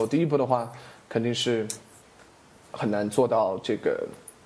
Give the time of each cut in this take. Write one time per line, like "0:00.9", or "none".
none